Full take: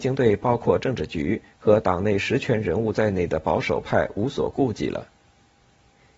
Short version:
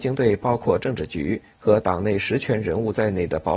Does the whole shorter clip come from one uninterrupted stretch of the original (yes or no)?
yes